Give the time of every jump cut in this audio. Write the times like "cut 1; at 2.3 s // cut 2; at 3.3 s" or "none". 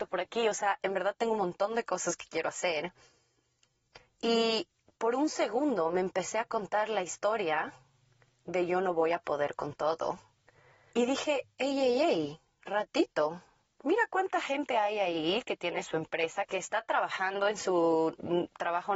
cut 1; at 13.7 s // cut 2; at 16.4 s